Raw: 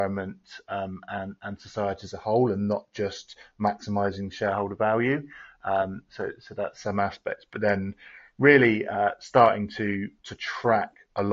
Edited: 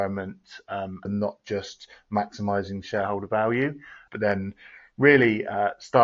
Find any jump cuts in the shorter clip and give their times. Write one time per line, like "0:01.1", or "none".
0:01.1
0:04.1

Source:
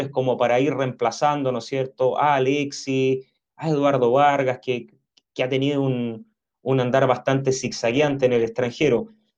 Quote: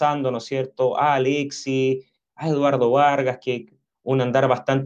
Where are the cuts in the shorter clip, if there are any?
0:03.9

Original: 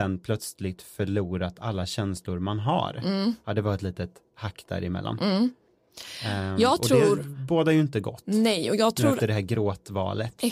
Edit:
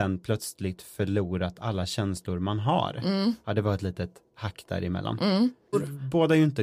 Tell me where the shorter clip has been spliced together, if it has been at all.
0:05.7

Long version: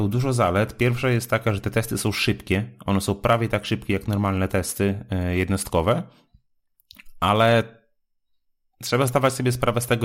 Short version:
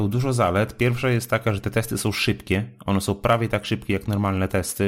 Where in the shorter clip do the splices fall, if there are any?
none

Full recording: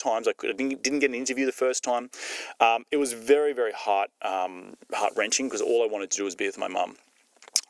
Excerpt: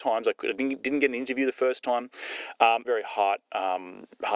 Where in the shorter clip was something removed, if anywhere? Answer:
0:02.8

